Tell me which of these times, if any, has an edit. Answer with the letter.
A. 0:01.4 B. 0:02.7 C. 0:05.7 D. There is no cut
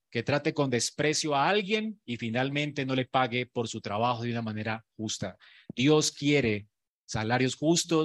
D